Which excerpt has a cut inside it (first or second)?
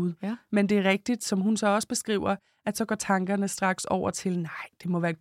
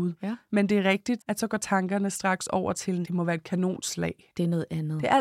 second